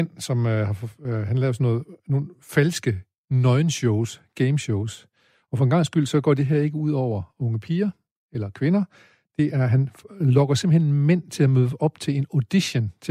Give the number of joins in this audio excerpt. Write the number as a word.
zero